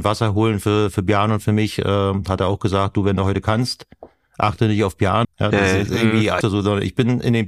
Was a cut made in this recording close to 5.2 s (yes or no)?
yes